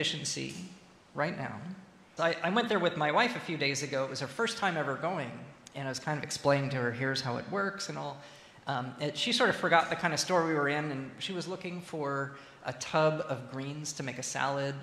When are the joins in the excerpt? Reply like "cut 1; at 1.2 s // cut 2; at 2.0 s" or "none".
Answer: cut 1; at 2.2 s